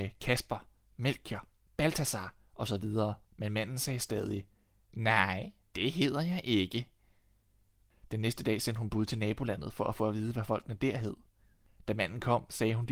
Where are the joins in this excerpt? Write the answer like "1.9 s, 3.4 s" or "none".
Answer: 3.2 s

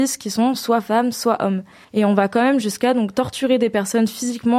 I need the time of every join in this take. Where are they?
1.8 s

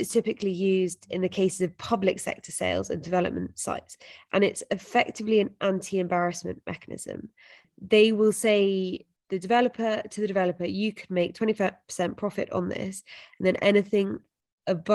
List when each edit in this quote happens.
7.6 s, 9.2 s

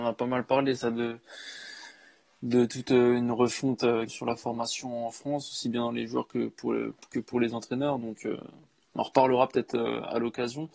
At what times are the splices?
4.1 s

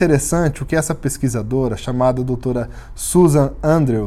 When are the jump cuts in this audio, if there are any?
none

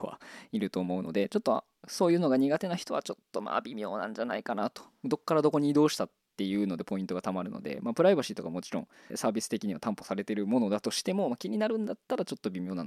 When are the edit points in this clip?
9.1 s

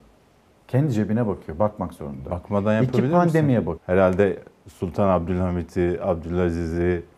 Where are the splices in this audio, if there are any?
3.8 s

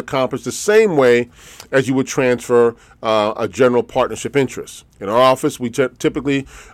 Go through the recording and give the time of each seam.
4.9 s

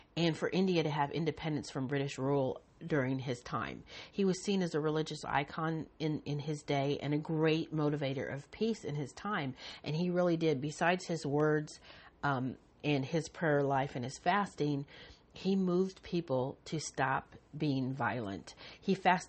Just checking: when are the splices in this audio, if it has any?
4.1 s

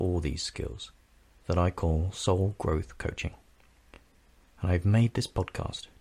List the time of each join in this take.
none

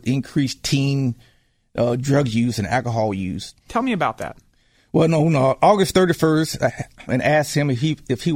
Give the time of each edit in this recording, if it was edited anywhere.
3.7 s, 7.1 s

